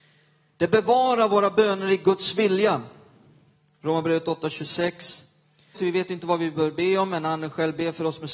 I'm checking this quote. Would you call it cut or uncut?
cut